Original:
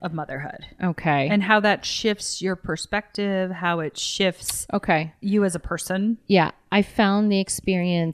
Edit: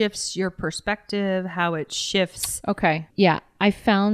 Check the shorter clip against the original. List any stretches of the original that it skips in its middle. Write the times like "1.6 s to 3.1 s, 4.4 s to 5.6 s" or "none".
5.2 s to 6.2 s